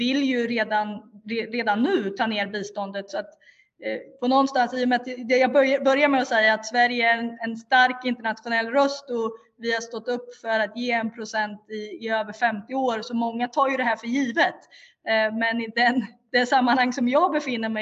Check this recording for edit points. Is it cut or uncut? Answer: cut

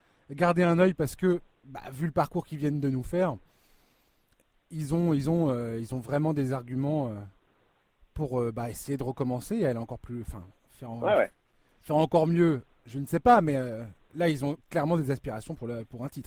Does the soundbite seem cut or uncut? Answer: uncut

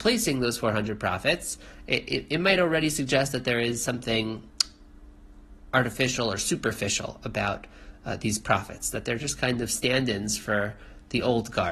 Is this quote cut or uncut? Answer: uncut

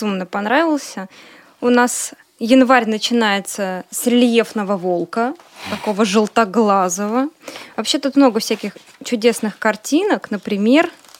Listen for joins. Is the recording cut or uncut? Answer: uncut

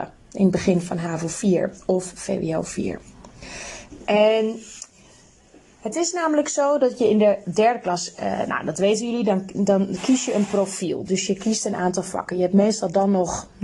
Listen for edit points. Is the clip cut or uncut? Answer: uncut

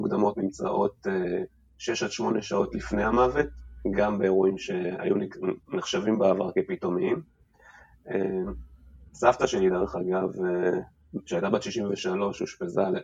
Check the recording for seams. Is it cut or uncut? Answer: uncut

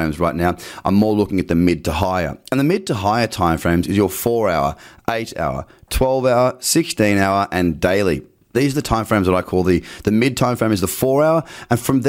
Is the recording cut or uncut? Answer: uncut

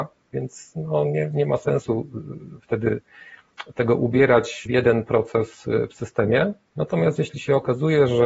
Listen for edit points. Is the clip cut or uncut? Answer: cut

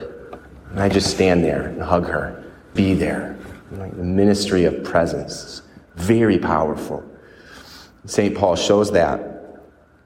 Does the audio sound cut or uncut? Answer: cut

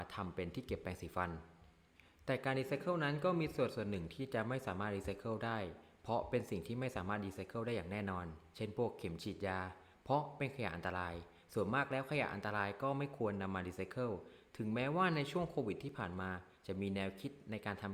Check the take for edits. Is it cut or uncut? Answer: uncut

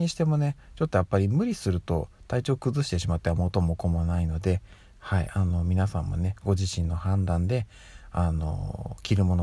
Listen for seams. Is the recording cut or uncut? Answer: uncut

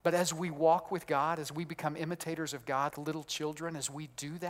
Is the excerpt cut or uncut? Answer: cut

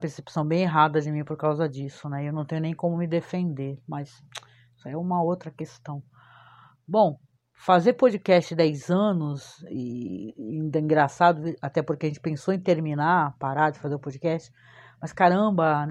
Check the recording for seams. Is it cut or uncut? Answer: uncut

